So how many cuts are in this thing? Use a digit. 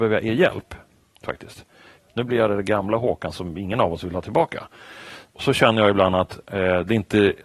2